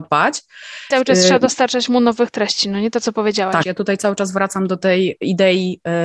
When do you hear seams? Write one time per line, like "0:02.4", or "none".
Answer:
0:00.9
0:03.6